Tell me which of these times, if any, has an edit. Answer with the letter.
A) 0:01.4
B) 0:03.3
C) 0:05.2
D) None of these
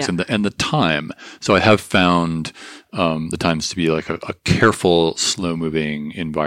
D